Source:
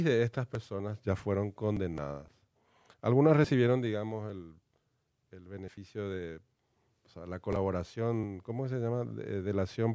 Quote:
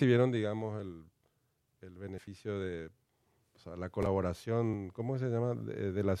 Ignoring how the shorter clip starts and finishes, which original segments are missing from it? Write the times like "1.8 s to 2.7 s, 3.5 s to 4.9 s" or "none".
none